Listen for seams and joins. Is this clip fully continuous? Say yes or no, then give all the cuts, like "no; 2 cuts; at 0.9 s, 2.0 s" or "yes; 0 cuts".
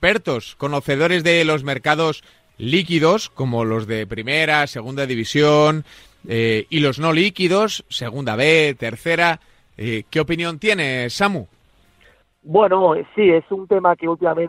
yes; 0 cuts